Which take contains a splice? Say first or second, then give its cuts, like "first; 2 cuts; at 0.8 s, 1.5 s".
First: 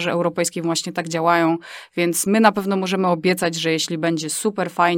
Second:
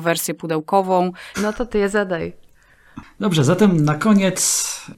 second; 1 cut; at 1.3 s